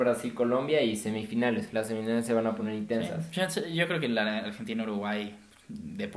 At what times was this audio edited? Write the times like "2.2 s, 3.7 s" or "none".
none